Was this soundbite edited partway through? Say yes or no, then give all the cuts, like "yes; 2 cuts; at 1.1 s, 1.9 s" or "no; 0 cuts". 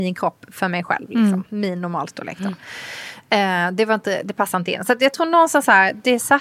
no; 0 cuts